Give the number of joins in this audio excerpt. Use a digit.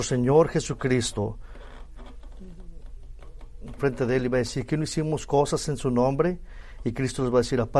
1